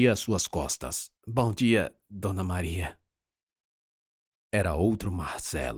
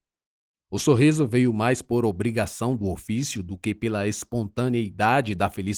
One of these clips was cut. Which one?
first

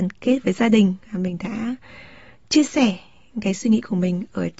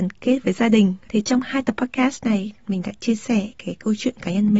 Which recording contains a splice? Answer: second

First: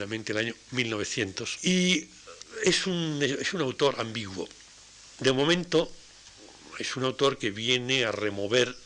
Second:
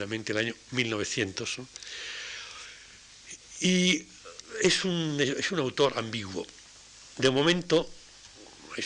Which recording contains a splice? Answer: first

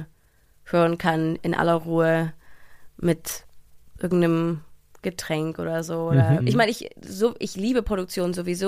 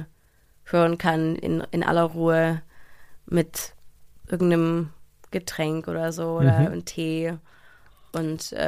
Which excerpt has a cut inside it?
first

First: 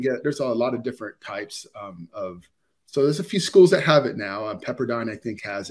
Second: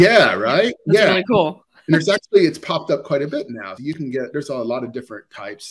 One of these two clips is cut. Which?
second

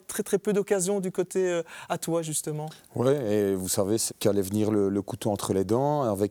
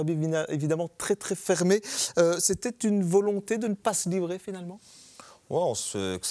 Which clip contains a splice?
first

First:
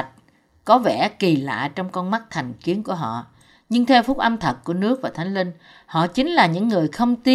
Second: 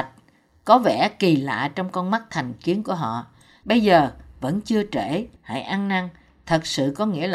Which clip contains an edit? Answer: second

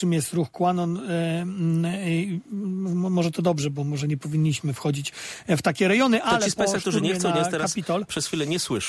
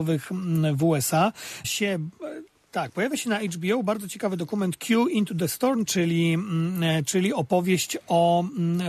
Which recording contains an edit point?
second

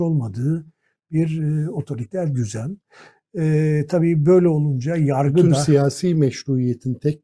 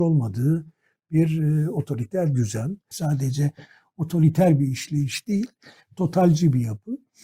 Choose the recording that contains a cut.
second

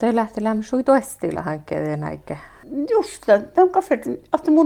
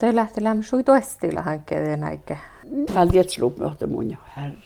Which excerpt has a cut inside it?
second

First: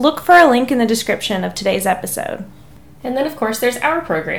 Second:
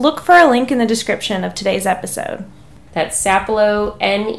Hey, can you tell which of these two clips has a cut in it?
second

